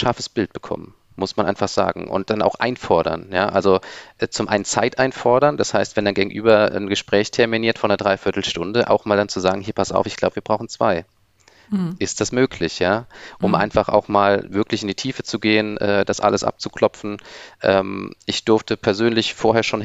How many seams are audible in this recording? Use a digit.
0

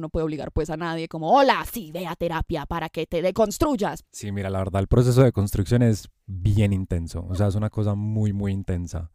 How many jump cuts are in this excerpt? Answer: 1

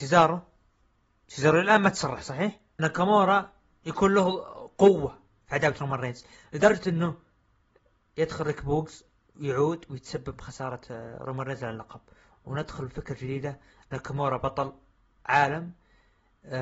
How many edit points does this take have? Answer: 1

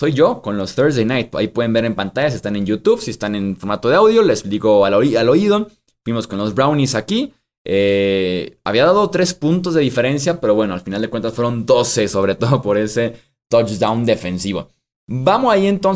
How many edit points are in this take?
0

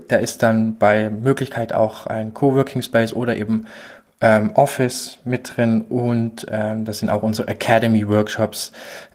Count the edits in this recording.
0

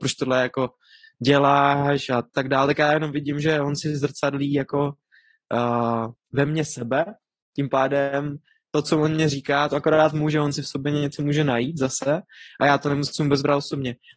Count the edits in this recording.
1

